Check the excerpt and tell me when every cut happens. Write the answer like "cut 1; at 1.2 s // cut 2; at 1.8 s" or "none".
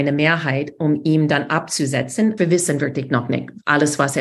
cut 1; at 2.4 s